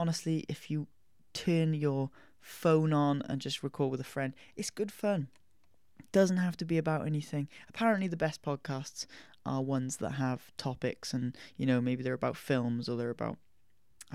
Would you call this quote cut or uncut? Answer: uncut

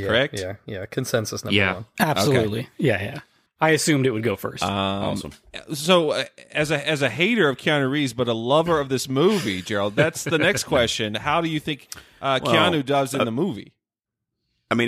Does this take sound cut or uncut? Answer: cut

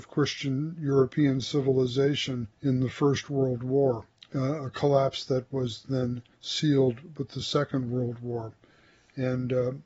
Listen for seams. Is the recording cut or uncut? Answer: cut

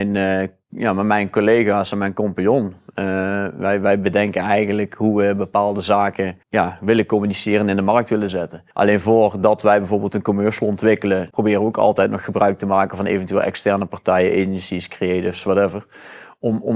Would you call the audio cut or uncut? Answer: cut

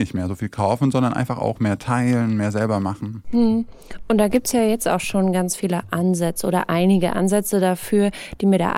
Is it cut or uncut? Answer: uncut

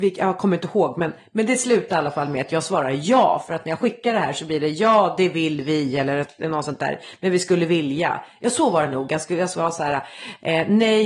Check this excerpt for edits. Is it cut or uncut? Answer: uncut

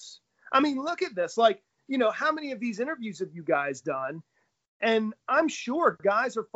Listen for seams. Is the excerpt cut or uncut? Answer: uncut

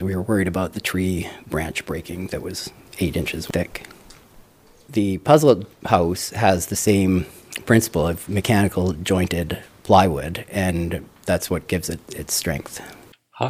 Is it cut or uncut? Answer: uncut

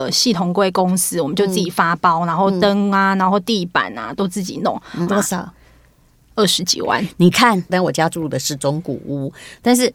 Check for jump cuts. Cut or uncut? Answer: cut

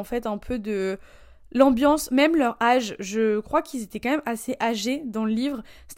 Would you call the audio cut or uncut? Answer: uncut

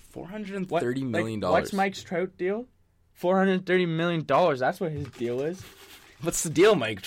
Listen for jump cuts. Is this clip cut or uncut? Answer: uncut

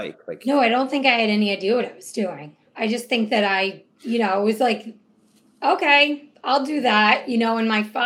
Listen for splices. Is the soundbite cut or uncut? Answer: uncut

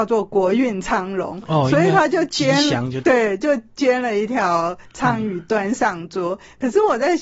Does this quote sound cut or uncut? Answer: cut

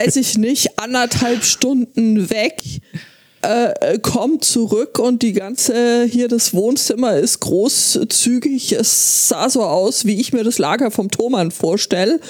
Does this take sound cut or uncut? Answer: uncut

